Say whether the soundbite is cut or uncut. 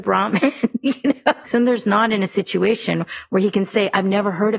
cut